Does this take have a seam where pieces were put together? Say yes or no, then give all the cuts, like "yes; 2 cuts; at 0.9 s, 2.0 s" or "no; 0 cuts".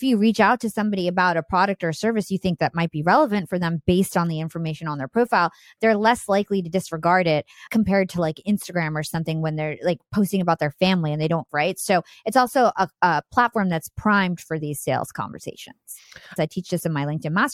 yes; 2 cuts; at 11.5 s, 16.4 s